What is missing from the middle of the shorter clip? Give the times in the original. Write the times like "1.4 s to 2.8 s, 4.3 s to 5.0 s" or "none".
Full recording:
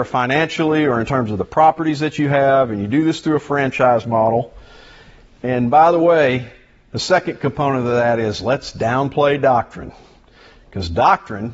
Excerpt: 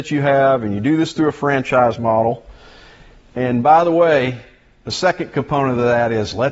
none